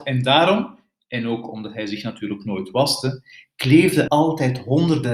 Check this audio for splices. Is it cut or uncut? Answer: cut